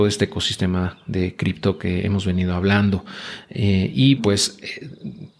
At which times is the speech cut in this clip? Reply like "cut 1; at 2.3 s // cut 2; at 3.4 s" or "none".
cut 1; at 4.2 s